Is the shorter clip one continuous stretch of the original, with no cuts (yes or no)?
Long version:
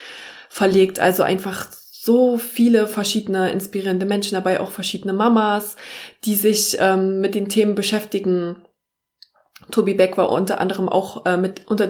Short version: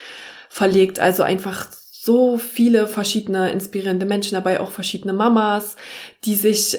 yes